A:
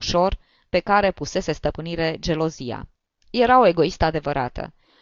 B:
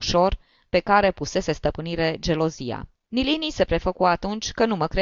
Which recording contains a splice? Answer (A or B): B